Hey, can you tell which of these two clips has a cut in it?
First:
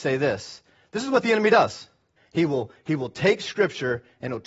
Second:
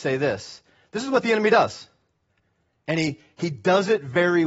first; 1 cut; at 2.2 s

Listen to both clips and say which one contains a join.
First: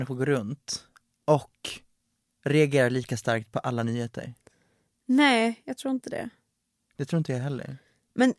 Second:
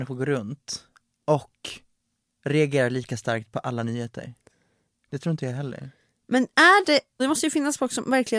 second; 2 cuts; at 5.0 s, 7.2 s

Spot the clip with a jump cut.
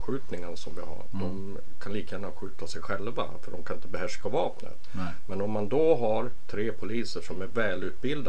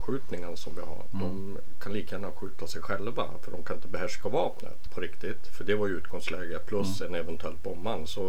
second; 1 cut; at 4.9 s

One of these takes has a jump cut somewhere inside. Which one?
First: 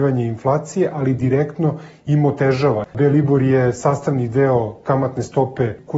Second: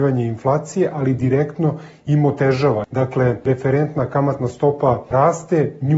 first; 1 cut; at 2.9 s

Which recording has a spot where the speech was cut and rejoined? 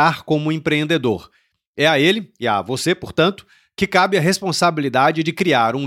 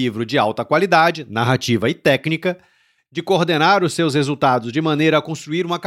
second; 1 cut; at 3.1 s

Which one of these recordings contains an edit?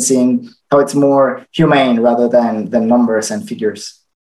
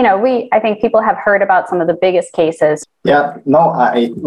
second; 1 cut; at 2.8 s

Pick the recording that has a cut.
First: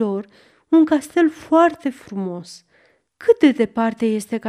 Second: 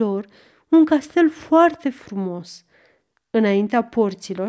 first; 1 cut; at 3.1 s

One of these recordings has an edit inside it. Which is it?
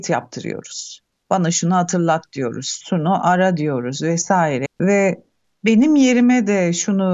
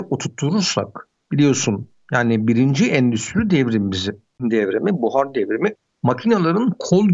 first; 2 cuts; at 2.8 s, 4.7 s

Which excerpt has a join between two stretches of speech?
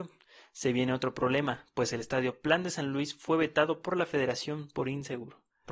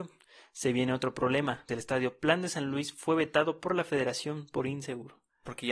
second; 1 cut; at 1.7 s

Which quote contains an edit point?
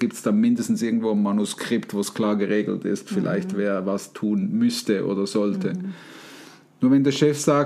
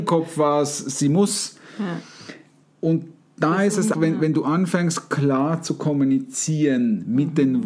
second; 1 cut; at 3.9 s

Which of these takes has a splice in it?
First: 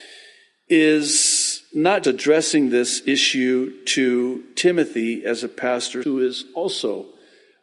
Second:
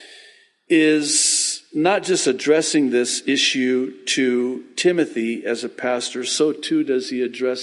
first; 2 cuts; at 2.0 s, 6.0 s

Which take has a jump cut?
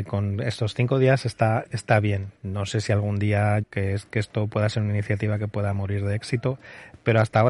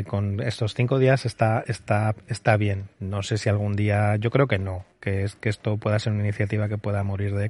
first; 2 cuts; at 1.7 s, 3.6 s

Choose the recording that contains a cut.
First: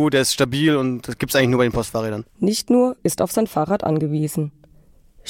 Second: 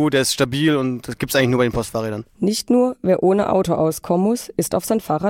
first; 1 cut; at 3.0 s

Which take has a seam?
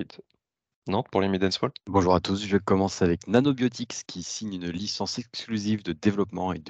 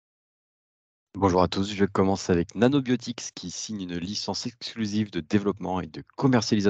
first; 1 cut; at 1.8 s

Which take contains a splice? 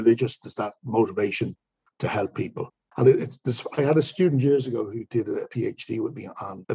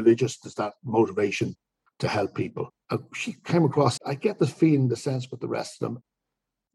second; 2 cuts; at 2.8 s, 4.0 s

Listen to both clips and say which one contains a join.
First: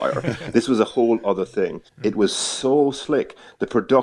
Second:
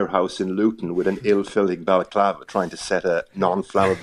first; 1 cut; at 1.9 s

